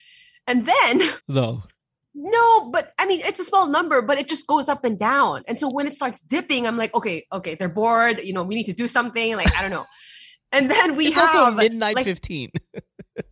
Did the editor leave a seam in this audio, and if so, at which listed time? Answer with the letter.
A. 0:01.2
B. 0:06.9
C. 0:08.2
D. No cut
A